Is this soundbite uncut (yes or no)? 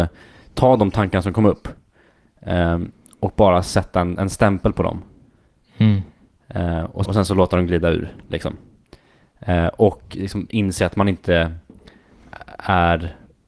no